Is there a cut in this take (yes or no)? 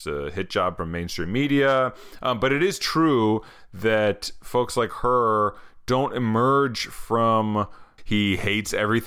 yes